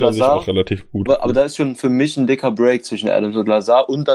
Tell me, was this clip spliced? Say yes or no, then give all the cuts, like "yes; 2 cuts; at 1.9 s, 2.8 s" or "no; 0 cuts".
yes; 1 cut; at 1.1 s